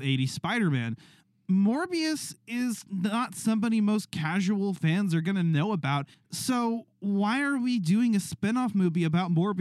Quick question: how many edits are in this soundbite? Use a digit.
1